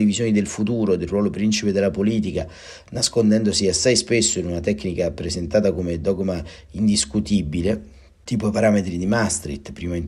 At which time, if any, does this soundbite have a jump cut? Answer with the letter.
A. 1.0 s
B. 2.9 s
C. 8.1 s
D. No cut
D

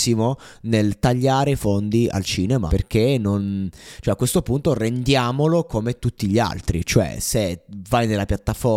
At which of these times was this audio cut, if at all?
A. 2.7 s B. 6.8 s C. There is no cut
A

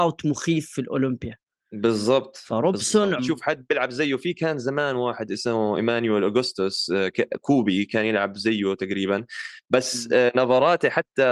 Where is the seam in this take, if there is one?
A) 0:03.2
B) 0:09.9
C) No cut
A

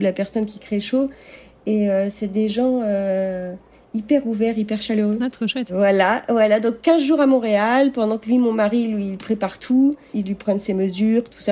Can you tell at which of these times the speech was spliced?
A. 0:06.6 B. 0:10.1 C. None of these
B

